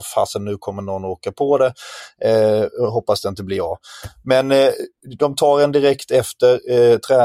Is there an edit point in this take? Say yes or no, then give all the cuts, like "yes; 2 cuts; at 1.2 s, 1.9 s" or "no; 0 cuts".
no; 0 cuts